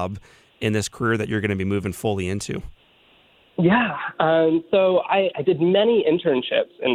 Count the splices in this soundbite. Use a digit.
0